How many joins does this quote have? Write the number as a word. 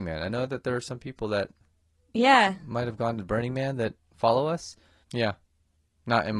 one